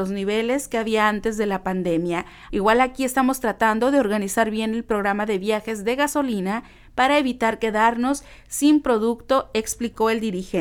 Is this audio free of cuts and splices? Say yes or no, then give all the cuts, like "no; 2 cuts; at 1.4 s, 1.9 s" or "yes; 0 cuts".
no; 1 cut; at 2.5 s